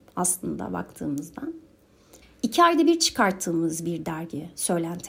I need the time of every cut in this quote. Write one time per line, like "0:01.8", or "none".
0:02.2